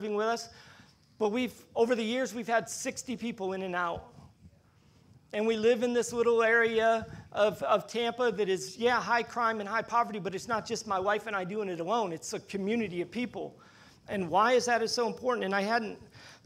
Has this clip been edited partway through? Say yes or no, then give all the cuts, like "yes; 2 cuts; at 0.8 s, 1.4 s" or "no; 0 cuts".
no; 0 cuts